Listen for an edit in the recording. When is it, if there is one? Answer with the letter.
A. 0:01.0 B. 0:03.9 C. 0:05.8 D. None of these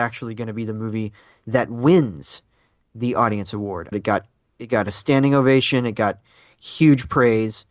B